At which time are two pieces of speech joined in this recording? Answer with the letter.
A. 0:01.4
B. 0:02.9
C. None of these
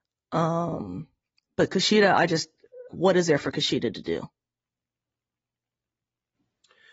B